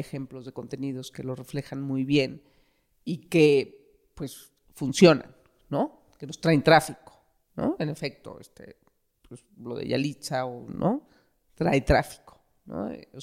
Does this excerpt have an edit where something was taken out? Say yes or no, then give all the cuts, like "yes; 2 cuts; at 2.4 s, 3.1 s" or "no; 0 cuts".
no; 0 cuts